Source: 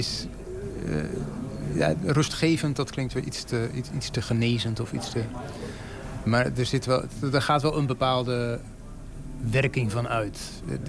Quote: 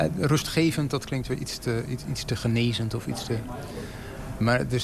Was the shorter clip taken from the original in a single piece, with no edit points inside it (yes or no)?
yes